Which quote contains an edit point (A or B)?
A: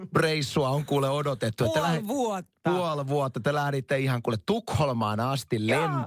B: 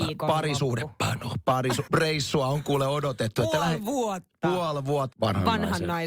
B